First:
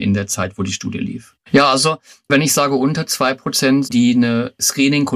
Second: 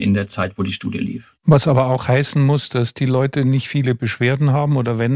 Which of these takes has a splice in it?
first; 2 cuts; at 1.4 s, 3.8 s

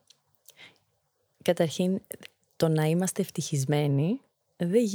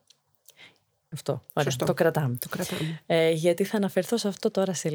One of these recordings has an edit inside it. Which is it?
second; 1 cut; at 1.1 s

